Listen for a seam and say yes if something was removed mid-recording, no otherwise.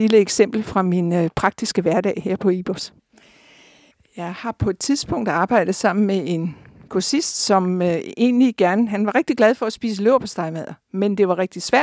no